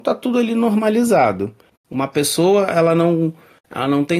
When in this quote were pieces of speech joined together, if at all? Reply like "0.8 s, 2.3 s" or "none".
1.7 s

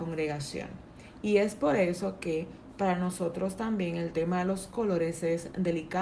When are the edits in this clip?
1.2 s

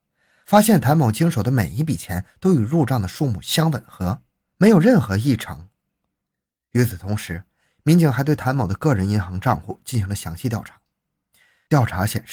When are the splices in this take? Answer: none

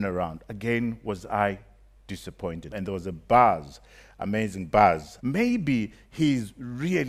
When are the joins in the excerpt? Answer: 2.7 s, 5.2 s

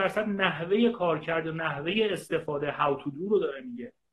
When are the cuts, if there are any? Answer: none

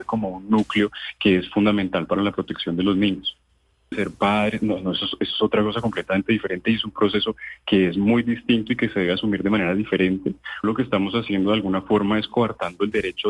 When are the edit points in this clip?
3.9 s, 10.6 s

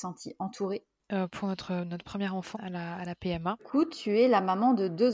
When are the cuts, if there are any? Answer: 2.5 s, 3.6 s

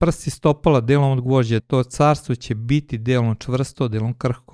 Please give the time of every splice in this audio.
1.6 s

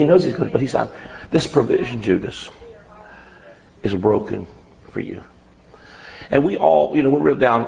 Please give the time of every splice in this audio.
none

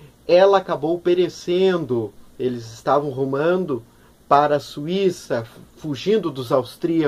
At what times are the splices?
none

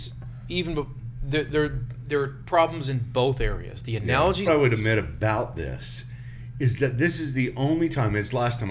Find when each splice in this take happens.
4.4 s

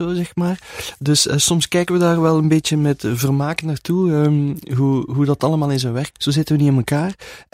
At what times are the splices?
5.1 s, 6.1 s

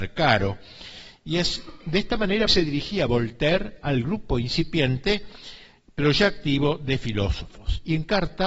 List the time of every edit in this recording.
2.5 s

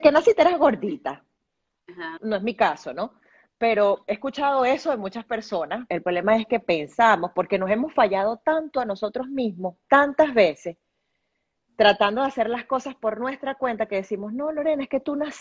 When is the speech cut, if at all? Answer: 2.2 s, 4.0 s, 5.9 s

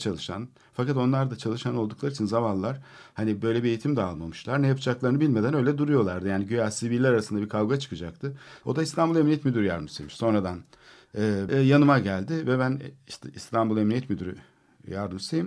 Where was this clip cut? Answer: 8.6 s, 11.5 s

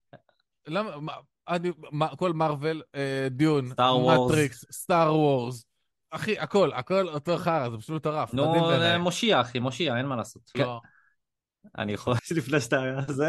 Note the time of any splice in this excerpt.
10.5 s, 12.2 s

